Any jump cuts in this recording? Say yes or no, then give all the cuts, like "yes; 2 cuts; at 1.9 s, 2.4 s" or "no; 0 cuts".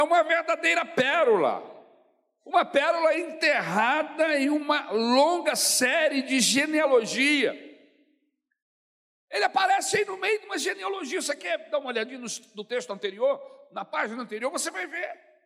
no; 0 cuts